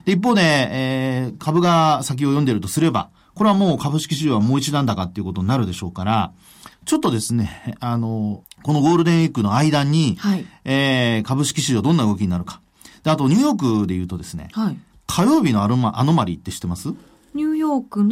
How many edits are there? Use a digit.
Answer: 1